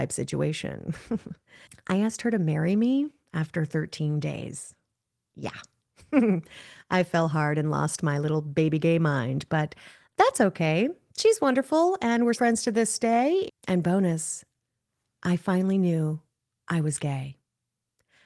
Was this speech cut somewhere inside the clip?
yes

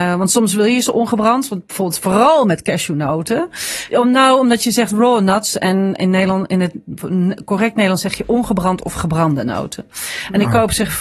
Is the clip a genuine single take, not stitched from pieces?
no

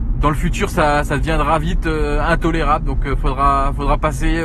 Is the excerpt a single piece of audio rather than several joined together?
yes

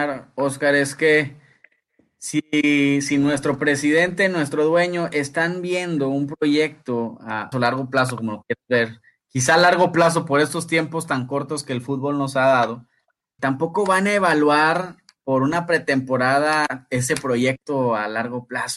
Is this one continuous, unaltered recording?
no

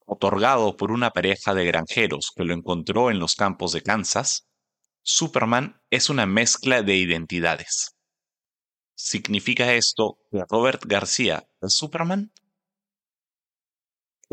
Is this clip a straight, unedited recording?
no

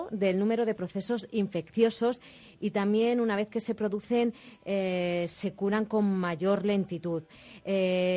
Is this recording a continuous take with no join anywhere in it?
yes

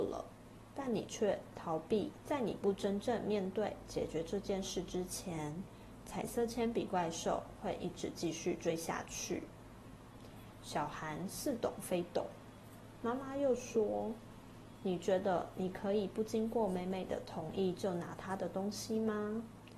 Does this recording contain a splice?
yes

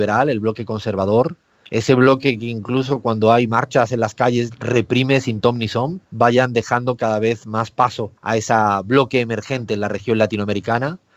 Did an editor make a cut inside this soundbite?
yes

